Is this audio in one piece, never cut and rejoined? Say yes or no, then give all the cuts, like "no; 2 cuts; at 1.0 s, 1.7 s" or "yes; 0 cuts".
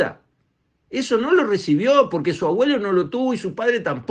yes; 0 cuts